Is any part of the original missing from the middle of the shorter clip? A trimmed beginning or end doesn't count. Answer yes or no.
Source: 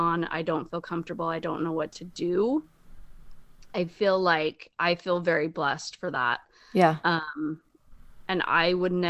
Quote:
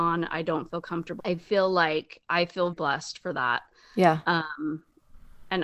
yes